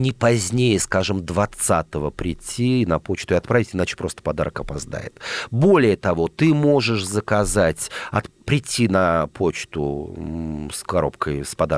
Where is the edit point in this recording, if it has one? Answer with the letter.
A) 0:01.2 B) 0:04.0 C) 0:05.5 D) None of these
D